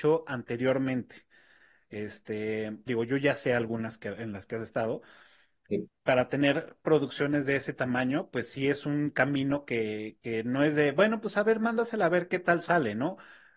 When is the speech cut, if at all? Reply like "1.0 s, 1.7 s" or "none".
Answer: 2.9 s